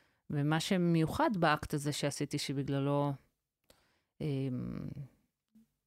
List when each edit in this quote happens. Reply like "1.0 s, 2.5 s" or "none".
none